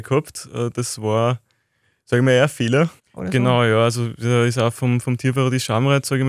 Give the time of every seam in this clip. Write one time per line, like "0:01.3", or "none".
0:03.0